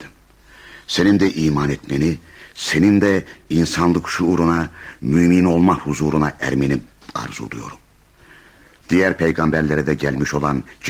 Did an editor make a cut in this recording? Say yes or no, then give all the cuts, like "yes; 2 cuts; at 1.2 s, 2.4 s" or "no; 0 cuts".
yes; 1 cut; at 8.8 s